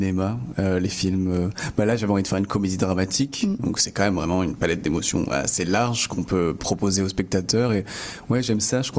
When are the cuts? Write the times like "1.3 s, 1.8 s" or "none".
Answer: none